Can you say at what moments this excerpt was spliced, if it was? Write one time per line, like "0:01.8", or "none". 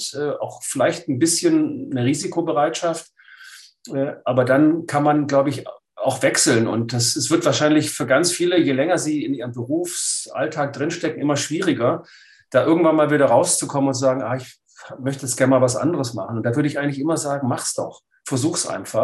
none